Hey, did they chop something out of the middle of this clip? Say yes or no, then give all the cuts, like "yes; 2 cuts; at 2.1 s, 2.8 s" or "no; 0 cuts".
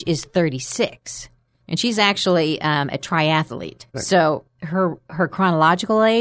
yes; 1 cut; at 3.9 s